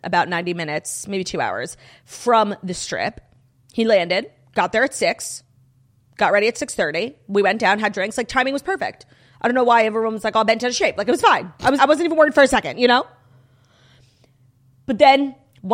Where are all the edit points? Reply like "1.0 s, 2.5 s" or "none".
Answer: 11.8 s